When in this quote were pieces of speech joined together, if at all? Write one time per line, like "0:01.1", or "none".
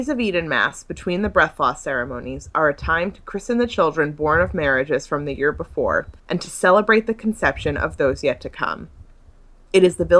0:06.2